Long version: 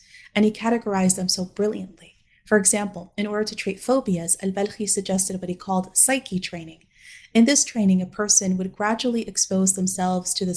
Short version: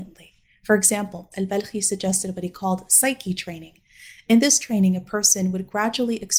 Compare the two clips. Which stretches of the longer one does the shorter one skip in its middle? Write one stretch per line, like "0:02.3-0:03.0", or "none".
0:03.1-0:04.4